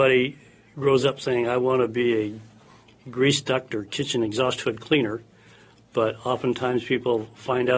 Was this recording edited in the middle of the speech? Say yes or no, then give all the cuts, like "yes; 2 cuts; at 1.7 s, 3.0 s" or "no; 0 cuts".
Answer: no; 0 cuts